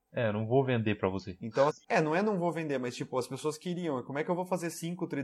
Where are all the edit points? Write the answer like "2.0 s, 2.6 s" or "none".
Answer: 1.7 s